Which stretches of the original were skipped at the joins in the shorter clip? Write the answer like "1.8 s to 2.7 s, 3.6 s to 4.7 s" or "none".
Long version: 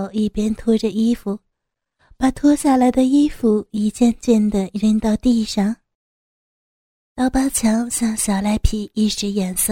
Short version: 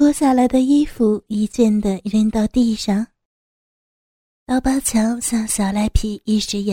3.9 s to 4.2 s